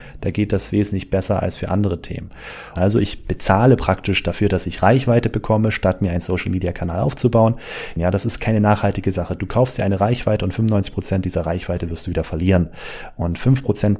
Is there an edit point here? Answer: yes; 2 cuts; at 2.8 s, 8.0 s

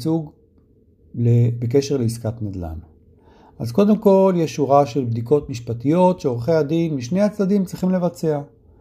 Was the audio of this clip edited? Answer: no; 0 cuts

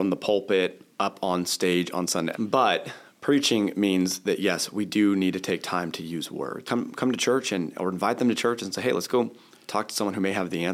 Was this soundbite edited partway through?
yes; 2 cuts; at 2.3 s, 6.6 s

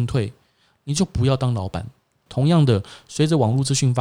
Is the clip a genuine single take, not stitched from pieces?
no; 1 cut; at 2.3 s

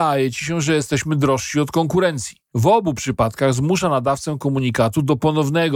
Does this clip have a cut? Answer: yes; 1 cut; at 2.5 s

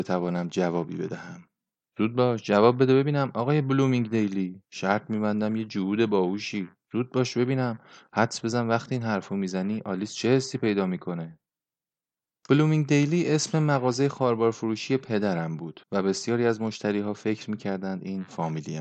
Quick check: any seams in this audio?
yes; 2 cuts; at 4.6 s, 15.8 s

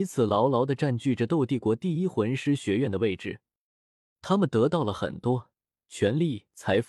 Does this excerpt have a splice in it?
no; 0 cuts

